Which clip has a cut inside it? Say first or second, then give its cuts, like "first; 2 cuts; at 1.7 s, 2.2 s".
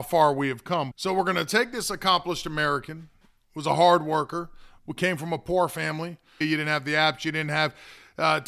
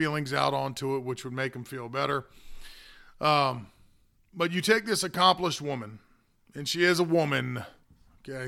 first; 2 cuts; at 0.9 s, 6.4 s